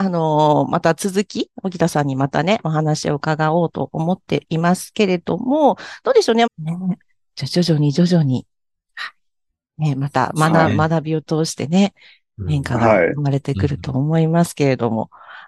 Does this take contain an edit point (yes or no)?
yes